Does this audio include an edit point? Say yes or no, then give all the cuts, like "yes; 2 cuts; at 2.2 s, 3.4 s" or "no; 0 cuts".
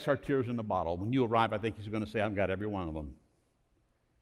no; 0 cuts